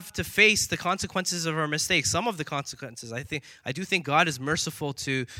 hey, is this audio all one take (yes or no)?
yes